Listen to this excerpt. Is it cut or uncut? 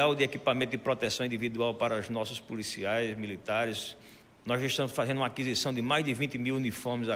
uncut